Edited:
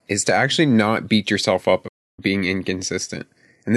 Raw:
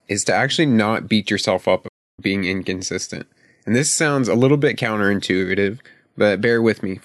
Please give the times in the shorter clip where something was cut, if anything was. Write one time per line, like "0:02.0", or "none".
none

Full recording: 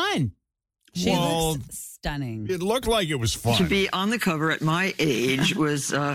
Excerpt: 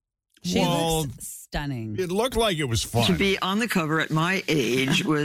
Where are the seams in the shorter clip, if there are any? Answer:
none

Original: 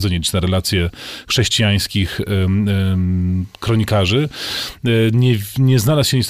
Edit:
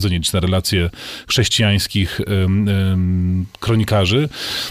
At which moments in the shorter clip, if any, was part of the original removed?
none

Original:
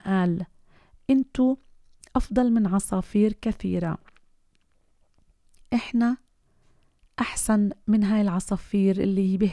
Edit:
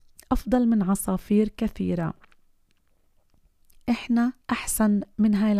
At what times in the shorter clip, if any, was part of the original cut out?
0:04.4

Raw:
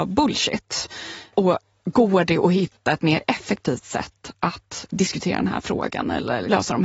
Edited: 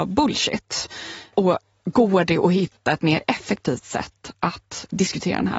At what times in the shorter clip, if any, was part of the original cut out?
none

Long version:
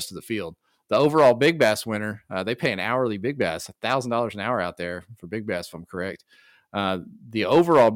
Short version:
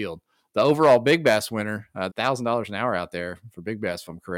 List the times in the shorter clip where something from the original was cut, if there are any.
0:02.1

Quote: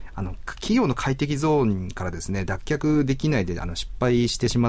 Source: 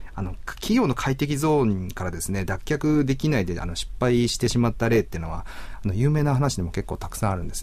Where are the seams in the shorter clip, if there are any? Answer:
none

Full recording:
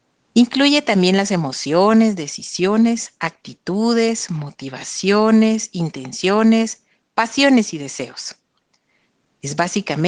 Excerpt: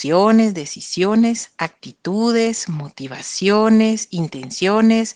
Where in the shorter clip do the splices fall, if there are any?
none

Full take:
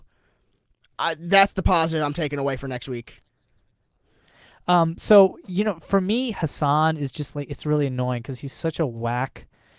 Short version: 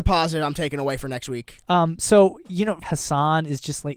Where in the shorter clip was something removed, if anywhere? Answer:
0:01.6
0:02.8

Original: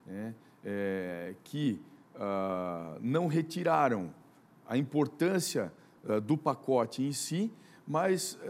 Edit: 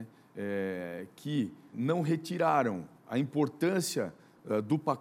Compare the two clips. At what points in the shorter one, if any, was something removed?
0:01.7
0:03.0

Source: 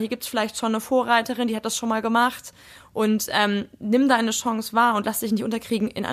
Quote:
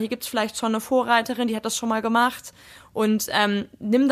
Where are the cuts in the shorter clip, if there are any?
none

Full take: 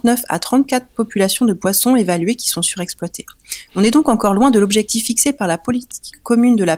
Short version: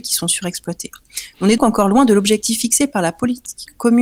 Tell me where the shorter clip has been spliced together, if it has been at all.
0:01.6

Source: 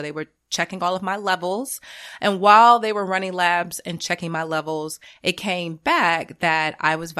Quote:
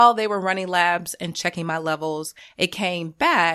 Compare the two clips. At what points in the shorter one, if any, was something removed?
none

